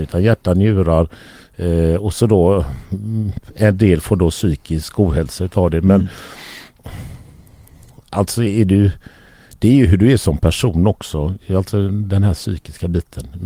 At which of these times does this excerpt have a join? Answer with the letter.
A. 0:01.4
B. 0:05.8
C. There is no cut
C